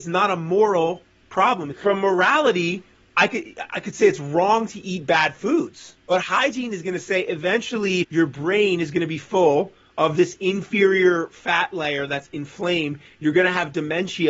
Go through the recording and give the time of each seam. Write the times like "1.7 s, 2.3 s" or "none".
1.7 s, 6.0 s, 8.0 s